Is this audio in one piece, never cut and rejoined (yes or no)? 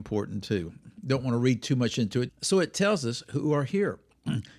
no